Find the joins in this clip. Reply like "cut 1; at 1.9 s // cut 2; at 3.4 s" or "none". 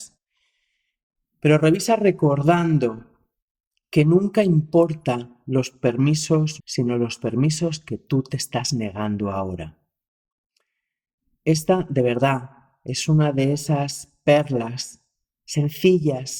cut 1; at 6.6 s